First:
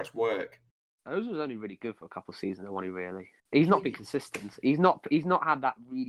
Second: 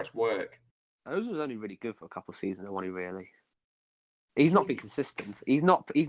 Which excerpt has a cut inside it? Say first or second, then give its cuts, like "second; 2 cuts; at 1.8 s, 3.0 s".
first; 1 cut; at 3.4 s